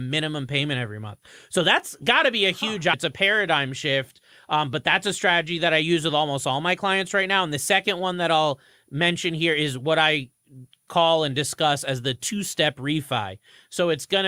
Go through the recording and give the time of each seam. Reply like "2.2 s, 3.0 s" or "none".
2.9 s